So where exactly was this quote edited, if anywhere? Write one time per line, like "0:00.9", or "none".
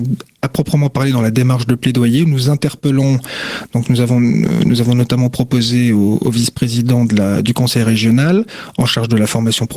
none

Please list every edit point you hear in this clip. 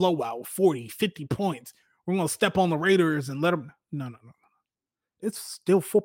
none

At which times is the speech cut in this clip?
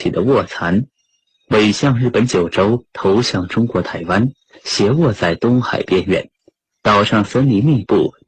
none

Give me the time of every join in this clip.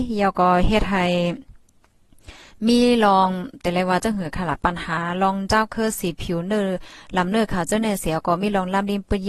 none

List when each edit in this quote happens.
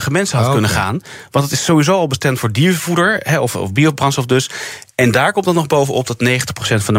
none

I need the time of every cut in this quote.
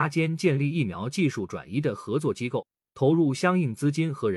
none

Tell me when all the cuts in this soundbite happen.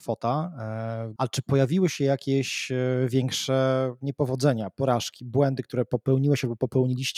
0:01.2

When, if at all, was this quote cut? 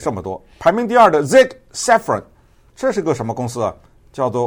none

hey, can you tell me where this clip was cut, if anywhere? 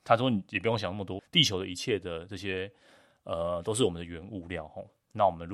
0:01.2

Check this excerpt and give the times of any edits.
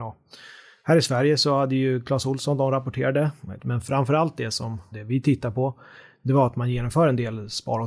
0:03.6
0:04.9

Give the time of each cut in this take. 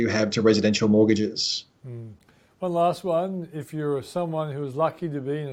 none

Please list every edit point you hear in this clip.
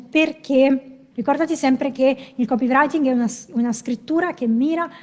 0:01.1

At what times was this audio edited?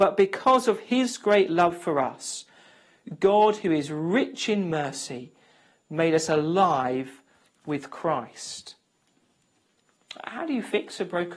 none

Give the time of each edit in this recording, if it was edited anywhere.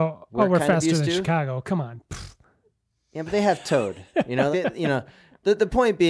0:04.5

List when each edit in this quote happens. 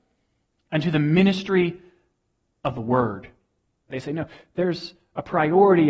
0:03.9

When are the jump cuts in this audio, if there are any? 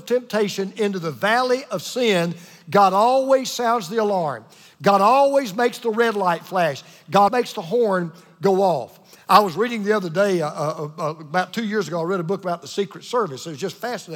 0:07.3

